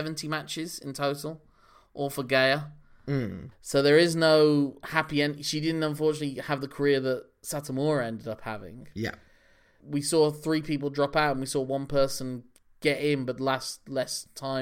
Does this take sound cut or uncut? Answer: cut